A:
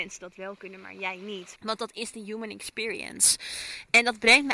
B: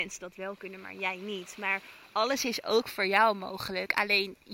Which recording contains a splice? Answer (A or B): A